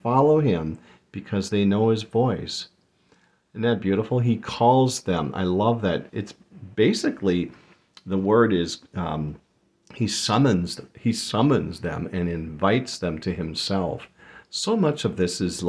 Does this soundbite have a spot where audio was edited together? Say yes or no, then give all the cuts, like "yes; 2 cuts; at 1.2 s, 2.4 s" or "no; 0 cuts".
no; 0 cuts